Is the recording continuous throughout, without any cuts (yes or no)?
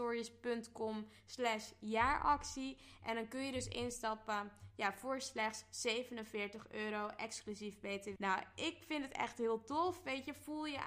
no